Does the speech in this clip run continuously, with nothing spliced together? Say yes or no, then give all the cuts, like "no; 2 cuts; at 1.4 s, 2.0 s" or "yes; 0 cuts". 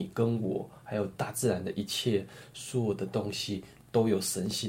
yes; 0 cuts